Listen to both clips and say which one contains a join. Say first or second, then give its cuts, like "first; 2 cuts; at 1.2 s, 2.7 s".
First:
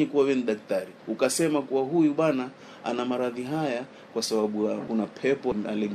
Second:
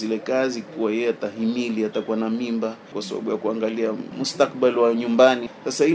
second; 1 cut; at 2.9 s